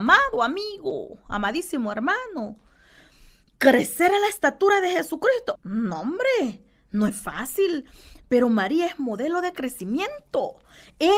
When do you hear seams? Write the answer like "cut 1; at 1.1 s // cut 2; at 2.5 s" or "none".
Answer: cut 1; at 5.6 s